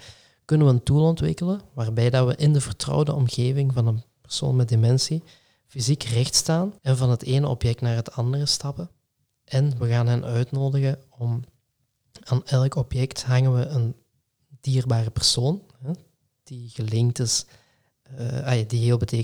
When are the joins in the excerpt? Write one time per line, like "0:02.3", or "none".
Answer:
0:06.8